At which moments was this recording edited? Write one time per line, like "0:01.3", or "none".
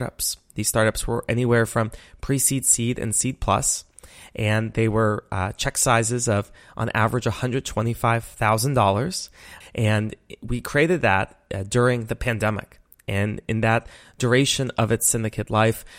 0:09.6